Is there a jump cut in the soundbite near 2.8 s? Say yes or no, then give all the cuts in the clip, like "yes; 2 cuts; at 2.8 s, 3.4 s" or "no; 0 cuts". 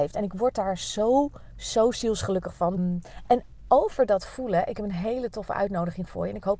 yes; 1 cut; at 2.8 s